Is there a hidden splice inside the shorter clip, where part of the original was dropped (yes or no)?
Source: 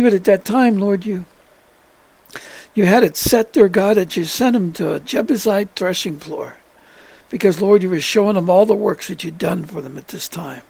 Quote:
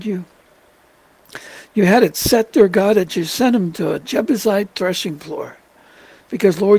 no